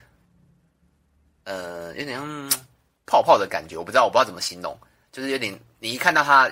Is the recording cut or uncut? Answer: uncut